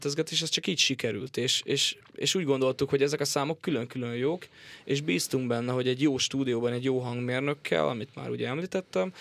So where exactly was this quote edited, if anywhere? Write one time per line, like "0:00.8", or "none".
none